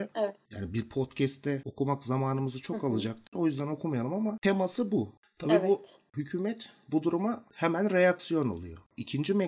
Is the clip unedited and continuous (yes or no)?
yes